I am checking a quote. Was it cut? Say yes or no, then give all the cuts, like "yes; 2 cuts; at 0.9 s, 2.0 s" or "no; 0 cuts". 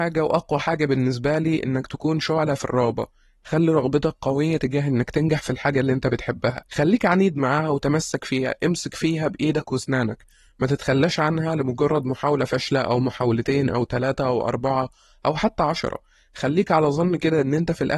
yes; 1 cut; at 6.7 s